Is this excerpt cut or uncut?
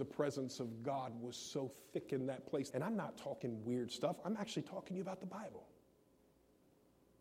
cut